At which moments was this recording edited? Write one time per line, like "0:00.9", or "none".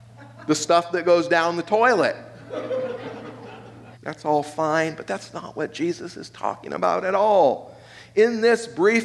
0:03.9